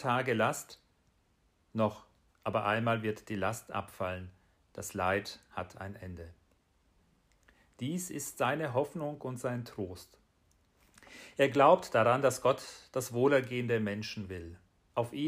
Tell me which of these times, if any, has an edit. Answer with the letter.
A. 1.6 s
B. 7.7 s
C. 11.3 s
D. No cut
D